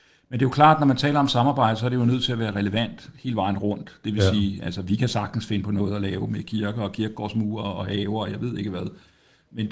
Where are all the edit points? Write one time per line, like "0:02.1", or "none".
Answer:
none

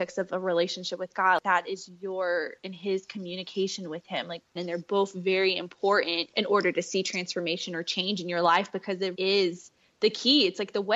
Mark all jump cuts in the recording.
0:04.6
0:09.1

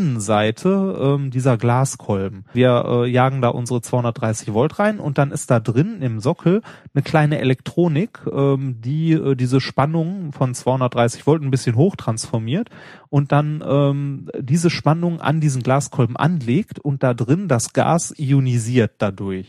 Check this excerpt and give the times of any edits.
0:02.5

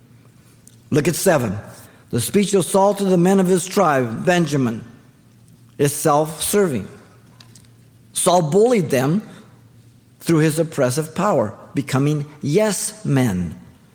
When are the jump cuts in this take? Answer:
none

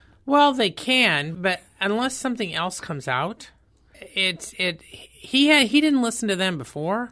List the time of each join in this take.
0:01.3
0:03.9

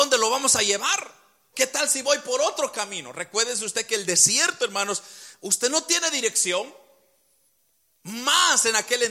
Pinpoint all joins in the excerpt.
0:01.5

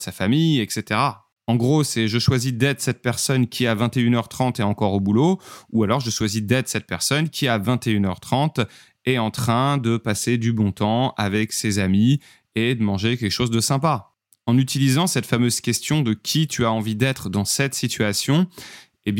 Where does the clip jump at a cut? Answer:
none

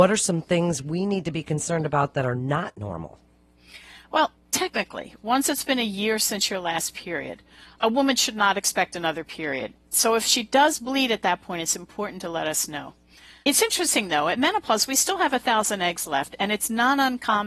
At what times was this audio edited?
none

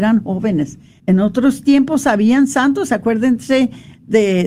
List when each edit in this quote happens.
0:01.0

